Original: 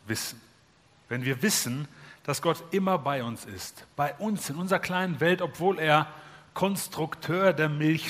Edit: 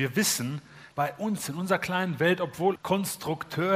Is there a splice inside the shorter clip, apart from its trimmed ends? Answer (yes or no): yes